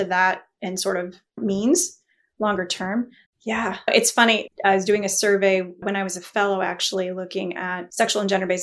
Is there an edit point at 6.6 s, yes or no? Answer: no